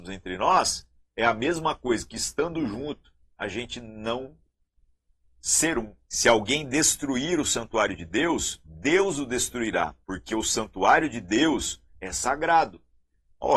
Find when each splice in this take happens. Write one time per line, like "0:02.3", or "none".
0:06.1
0:10.0
0:11.9

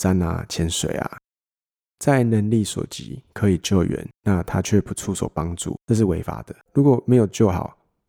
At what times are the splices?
0:04.1
0:06.7

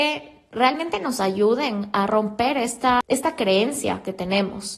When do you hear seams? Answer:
none

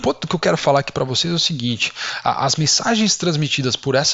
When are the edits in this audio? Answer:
none

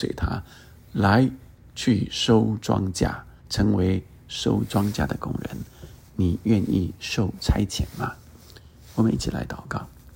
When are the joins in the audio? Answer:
0:03.4

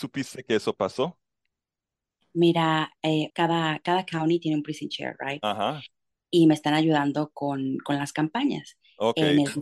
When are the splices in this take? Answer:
0:03.3

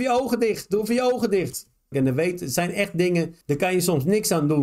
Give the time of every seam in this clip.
0:01.9
0:03.4

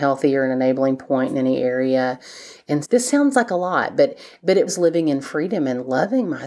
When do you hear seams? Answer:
0:02.8
0:04.7

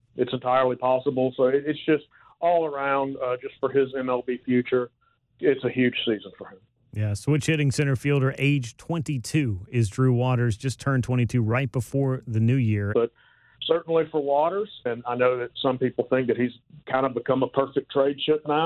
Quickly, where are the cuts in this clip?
0:12.9
0:14.9

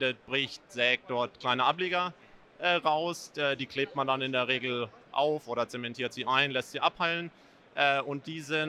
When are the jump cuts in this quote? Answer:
none

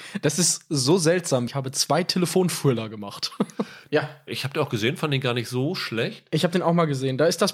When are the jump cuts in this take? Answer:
0:01.5
0:03.9

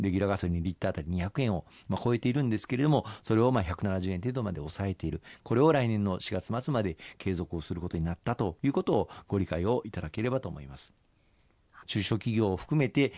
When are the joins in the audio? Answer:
0:11.8

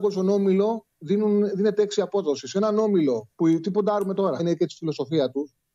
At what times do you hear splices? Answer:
0:03.3
0:04.4

